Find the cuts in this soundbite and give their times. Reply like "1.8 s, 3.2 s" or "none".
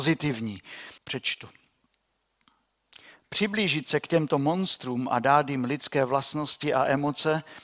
1.0 s